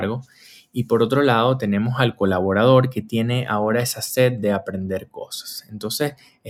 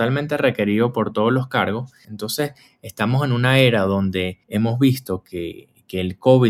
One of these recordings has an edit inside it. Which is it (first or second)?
second